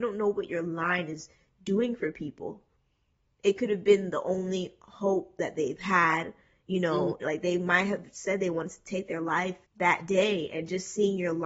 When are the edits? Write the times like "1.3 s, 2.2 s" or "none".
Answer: 7.2 s, 9.6 s